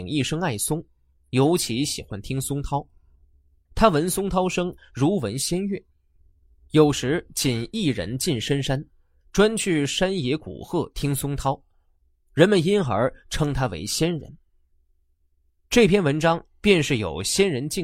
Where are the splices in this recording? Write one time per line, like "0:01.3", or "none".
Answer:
none